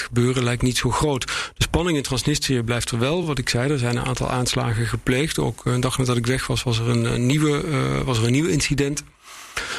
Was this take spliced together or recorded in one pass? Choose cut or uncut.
uncut